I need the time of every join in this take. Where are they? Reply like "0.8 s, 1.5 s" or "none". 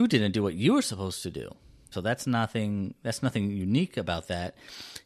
1.9 s